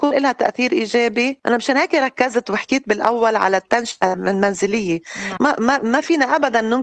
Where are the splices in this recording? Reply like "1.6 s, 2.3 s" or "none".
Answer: 5.4 s